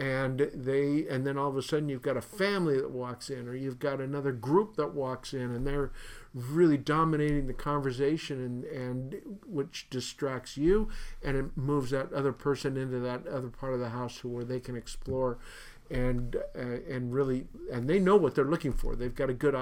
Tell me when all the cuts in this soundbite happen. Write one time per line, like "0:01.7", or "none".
none

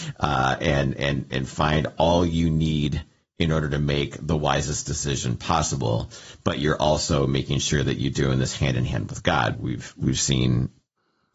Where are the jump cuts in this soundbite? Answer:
0:09.5

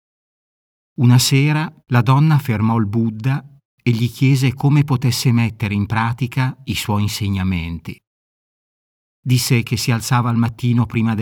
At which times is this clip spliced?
0:01.8

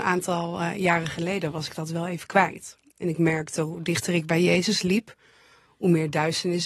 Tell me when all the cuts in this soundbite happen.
none

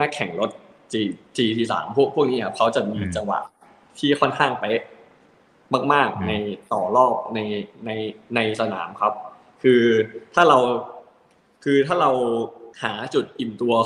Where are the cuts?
0:12.7

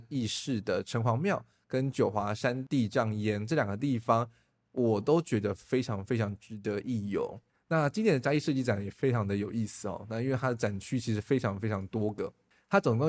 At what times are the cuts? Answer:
0:07.5

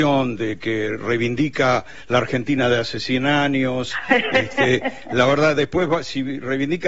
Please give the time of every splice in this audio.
none

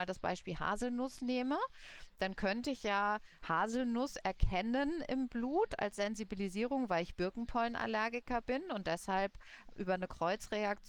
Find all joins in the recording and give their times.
none

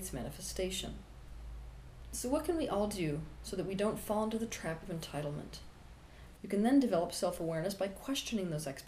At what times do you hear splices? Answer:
0:06.4

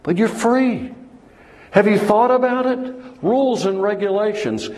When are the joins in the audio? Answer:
none

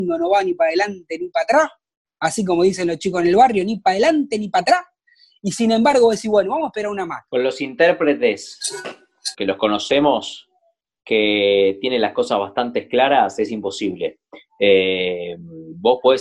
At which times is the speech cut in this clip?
0:07.3
0:09.3

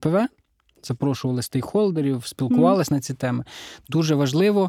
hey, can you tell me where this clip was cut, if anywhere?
none

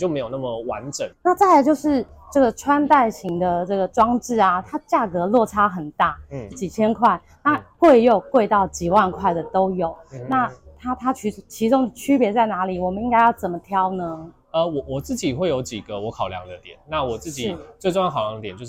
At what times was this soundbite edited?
0:01.1
0:06.5

